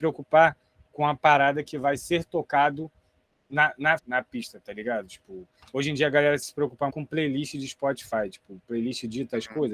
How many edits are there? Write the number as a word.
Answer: two